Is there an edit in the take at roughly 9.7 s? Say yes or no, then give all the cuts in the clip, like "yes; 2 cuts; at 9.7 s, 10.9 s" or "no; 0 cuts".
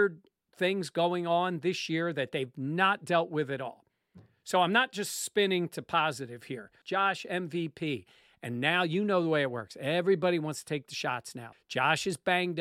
no; 2 cuts; at 6.8 s, 11.5 s